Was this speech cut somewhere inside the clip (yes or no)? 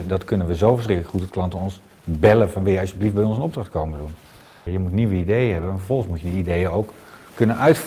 yes